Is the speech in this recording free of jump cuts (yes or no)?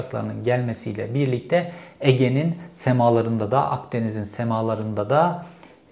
yes